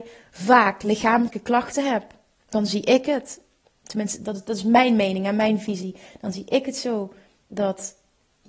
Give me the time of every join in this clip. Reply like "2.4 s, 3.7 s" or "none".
none